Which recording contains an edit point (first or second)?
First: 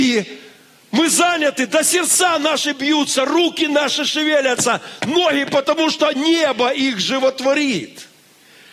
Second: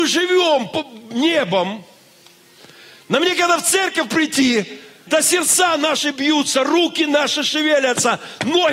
second